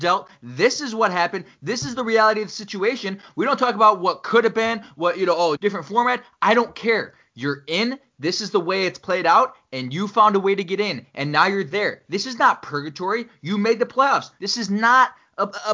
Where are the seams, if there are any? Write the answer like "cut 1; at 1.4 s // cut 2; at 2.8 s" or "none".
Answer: cut 1; at 5.6 s // cut 2; at 14.4 s